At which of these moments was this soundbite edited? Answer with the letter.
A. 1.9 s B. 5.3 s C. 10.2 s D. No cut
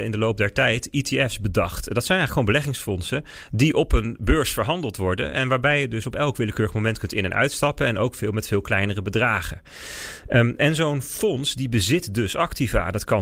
D